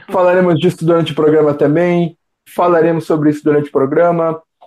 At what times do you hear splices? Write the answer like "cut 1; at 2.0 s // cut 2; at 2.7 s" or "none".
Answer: cut 1; at 2.5 s